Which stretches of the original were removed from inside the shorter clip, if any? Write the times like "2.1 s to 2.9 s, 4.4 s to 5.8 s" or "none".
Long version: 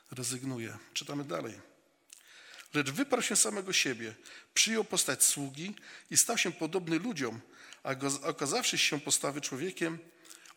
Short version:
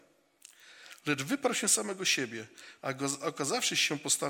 4.5 s to 7.8 s